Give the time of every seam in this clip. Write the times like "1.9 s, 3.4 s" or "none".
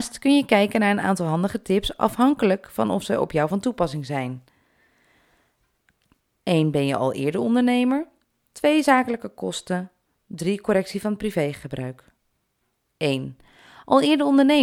none